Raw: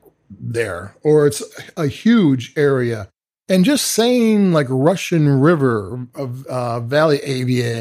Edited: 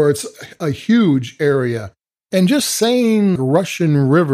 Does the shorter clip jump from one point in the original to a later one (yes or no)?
yes